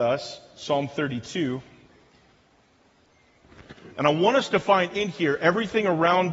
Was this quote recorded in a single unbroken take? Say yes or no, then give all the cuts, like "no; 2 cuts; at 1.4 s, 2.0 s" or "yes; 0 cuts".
yes; 0 cuts